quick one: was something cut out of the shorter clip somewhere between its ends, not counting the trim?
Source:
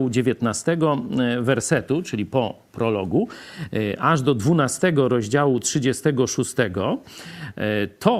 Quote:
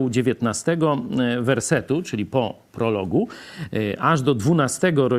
no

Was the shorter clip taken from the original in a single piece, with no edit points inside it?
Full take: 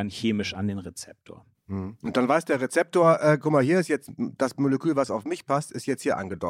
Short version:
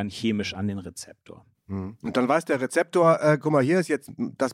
yes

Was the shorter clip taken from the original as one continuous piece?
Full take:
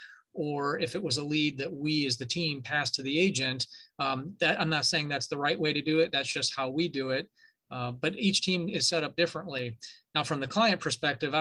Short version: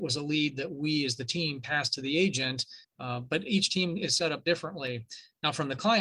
no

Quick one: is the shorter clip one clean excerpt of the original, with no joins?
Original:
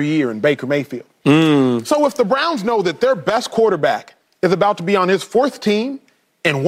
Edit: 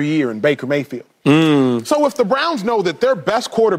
yes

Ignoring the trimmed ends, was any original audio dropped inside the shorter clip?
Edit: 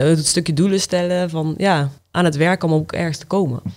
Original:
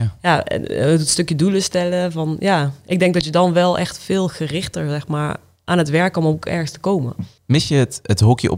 yes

